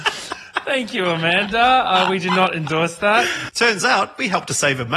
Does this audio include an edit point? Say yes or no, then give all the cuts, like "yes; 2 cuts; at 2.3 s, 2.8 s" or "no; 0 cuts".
yes; 1 cut; at 3.5 s